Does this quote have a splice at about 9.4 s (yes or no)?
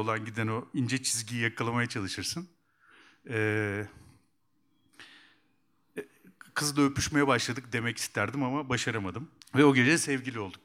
yes